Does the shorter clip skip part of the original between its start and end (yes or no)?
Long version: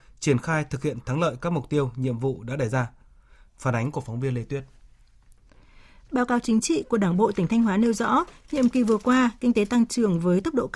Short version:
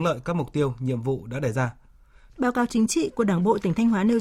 yes